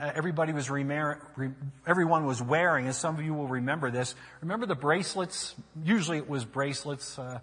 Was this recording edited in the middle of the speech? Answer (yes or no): no